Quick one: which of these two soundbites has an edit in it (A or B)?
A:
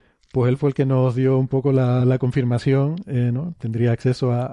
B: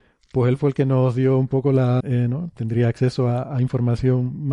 B